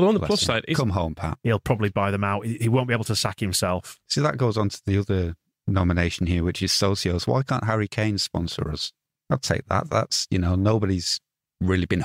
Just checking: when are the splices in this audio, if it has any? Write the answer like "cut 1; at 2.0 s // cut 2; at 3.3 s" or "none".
cut 1; at 1.4 s